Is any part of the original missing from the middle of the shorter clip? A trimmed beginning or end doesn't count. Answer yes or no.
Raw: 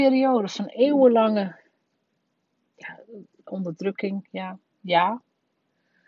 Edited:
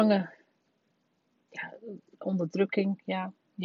no